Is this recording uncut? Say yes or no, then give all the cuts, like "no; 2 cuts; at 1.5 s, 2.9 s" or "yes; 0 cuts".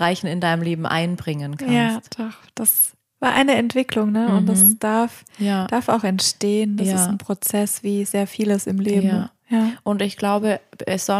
yes; 0 cuts